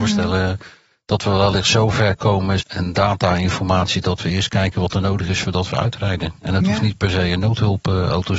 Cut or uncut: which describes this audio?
cut